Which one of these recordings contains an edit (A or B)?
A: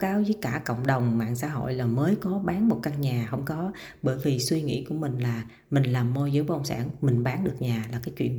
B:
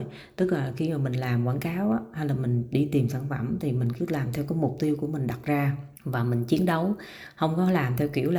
B